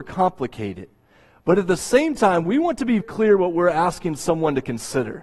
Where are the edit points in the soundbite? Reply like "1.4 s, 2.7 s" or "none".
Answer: 3.0 s